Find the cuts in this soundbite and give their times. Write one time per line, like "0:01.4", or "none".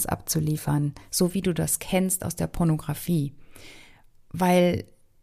none